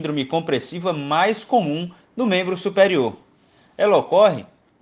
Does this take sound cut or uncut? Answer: uncut